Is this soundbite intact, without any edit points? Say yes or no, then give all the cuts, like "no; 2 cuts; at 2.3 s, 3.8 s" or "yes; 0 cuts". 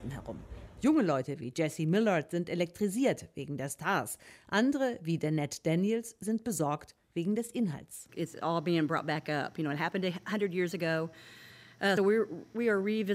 no; 1 cut; at 12.0 s